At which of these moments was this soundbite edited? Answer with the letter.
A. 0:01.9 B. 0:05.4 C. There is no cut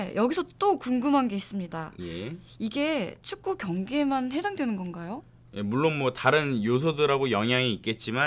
C